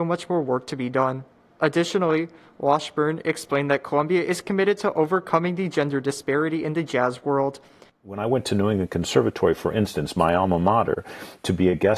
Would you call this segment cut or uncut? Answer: cut